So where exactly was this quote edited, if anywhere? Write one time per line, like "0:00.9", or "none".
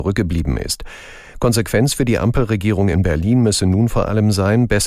0:01.3